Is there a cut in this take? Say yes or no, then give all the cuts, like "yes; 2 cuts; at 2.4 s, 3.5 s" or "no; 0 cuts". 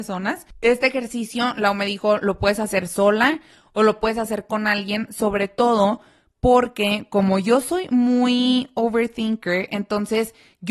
no; 0 cuts